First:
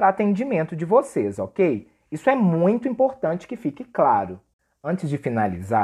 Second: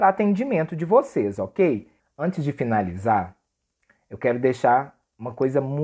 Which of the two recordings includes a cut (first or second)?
second